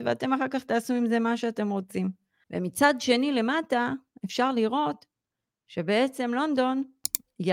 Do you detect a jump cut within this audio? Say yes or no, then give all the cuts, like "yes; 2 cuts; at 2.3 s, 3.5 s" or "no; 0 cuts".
yes; 1 cut; at 2.4 s